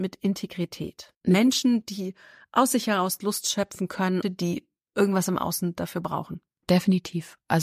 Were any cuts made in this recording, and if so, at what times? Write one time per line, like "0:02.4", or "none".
0:01.1
0:04.2